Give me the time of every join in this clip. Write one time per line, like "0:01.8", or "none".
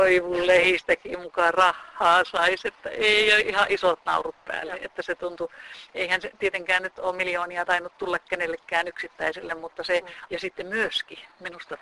0:03.4
0:10.3